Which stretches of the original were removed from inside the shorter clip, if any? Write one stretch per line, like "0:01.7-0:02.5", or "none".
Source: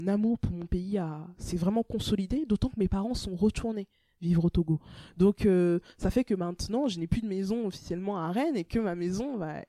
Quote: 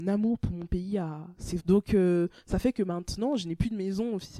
0:01.6-0:05.1